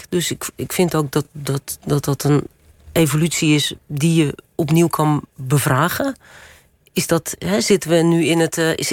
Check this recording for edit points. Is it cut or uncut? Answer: uncut